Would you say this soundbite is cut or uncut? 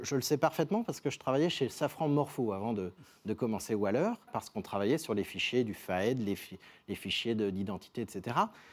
cut